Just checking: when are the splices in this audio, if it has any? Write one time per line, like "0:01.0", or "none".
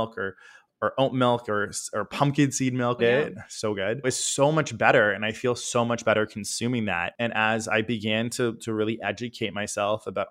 0:03.0
0:04.0